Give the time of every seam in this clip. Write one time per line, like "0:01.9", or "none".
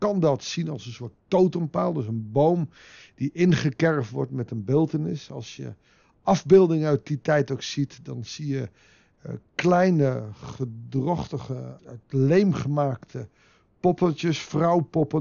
0:11.8